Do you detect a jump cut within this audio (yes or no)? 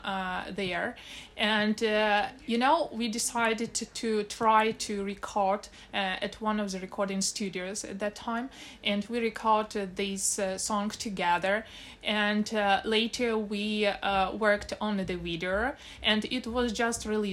no